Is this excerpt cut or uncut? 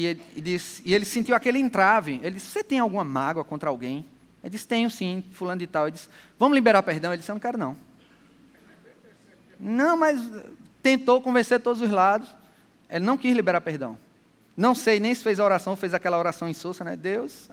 uncut